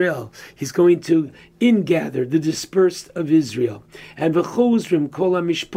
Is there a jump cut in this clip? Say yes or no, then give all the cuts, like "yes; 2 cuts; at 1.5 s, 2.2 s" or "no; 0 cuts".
no; 0 cuts